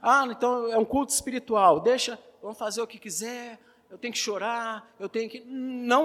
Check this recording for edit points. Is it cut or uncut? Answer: uncut